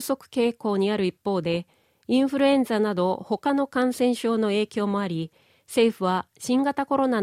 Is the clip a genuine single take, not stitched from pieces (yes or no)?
yes